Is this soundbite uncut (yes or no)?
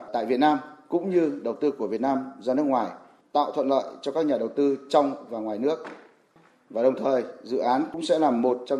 no